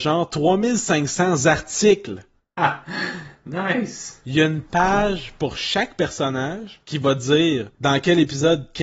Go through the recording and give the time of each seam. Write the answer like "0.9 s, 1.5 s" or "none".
none